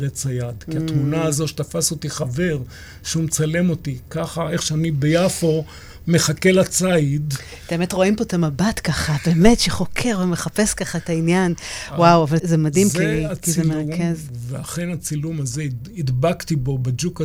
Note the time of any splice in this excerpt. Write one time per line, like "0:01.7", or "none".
0:12.4